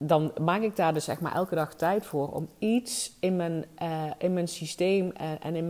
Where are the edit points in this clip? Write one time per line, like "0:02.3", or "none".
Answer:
none